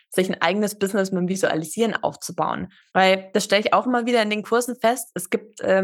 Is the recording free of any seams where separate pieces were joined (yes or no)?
yes